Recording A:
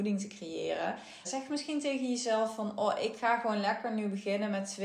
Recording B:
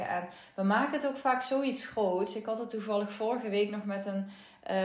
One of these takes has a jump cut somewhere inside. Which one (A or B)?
A